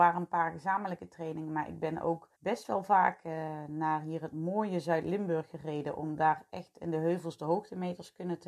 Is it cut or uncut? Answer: cut